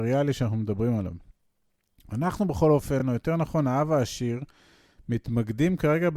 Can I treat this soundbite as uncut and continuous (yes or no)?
yes